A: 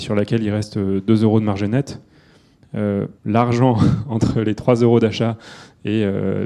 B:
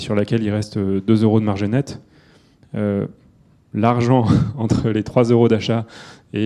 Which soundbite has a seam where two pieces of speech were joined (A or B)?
A